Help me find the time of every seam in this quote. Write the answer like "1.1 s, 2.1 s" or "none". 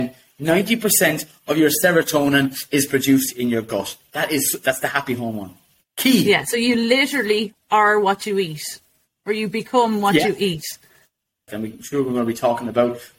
11.5 s